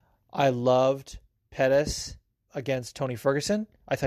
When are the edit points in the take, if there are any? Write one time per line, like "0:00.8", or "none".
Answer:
0:02.5